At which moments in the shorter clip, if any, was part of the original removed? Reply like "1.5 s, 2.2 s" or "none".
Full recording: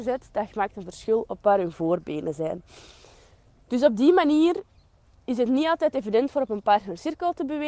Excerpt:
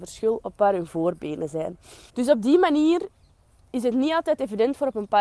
2.1 s